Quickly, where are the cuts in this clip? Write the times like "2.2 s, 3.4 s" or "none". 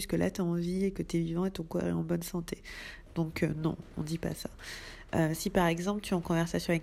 3.1 s